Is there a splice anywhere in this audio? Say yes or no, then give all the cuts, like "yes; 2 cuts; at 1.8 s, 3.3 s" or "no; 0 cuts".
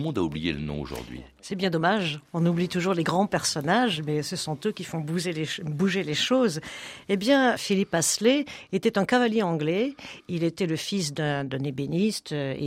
yes; 1 cut; at 7.6 s